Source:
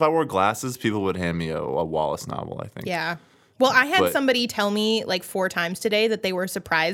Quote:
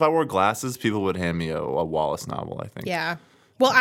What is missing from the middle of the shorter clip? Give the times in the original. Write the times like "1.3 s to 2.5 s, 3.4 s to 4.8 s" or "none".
none